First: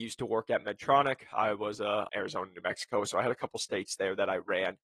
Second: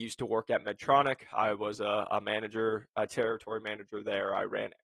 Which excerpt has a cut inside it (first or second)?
first